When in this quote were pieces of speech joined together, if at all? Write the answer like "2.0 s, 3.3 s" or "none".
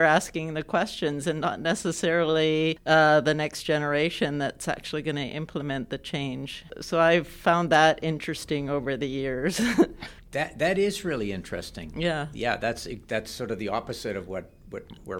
none